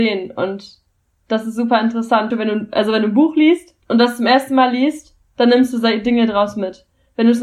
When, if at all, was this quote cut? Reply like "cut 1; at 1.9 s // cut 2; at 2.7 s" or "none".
cut 1; at 2.3 s